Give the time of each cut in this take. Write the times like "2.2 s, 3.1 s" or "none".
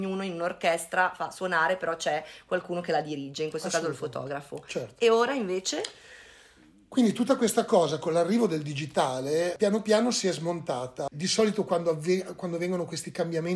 11.1 s